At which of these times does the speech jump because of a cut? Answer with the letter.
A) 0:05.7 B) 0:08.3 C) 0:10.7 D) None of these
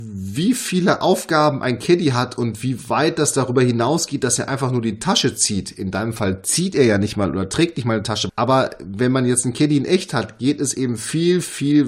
B